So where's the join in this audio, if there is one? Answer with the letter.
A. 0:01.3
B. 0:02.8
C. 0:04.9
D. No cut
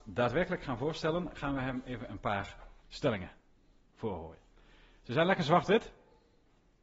B